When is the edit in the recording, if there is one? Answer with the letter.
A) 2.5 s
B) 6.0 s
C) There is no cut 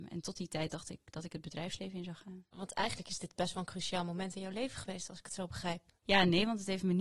B